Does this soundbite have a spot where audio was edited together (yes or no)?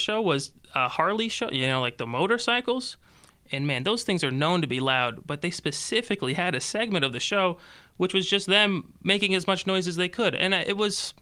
no